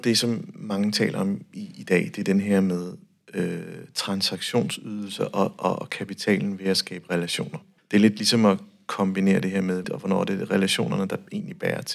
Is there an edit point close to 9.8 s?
yes; 2 cuts; at 7.8 s, 9.8 s

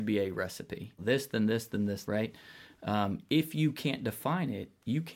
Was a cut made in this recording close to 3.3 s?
no; 2 cuts; at 1.0 s, 2.0 s

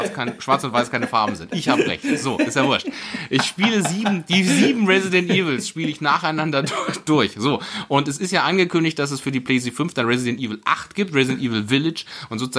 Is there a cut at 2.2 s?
no; 0 cuts

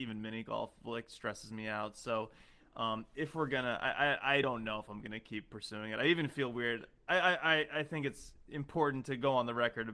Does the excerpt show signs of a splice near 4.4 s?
no; 0 cuts

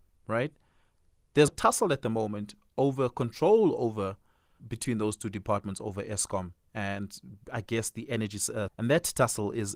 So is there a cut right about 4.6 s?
yes; 3 cuts; at 1.5 s, 4.6 s, 8.7 s

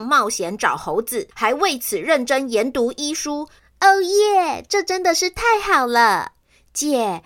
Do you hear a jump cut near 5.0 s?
no; 2 cuts; at 1.3 s, 3.6 s

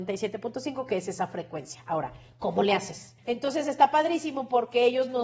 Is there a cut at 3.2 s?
yes; 1 cut; at 3.2 s

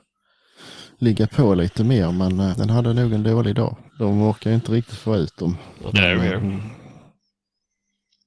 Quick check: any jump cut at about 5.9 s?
yes; 3 cuts; at 2.5 s, 3.9 s, 5.9 s

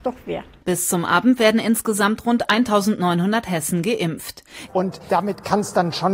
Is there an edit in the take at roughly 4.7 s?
yes; 1 cut; at 4.7 s

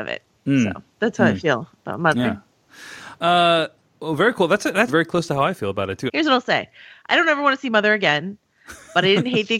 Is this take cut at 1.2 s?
no; 2 cuts; at 4.9 s, 6.1 s

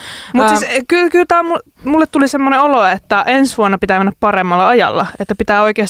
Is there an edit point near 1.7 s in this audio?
no; 0 cuts

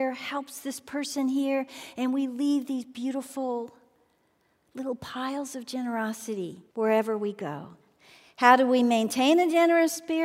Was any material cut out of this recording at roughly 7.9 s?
no; 1 cut; at 6.7 s

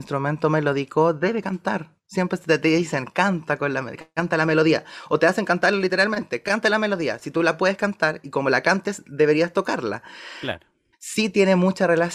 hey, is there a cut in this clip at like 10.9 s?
yes; 1 cut; at 10.9 s

